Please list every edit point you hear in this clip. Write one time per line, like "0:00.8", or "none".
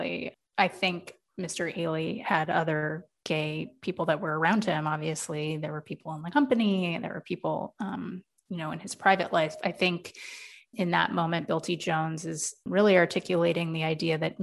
none